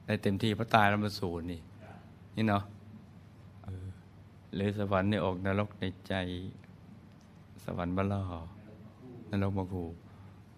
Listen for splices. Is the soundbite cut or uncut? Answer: cut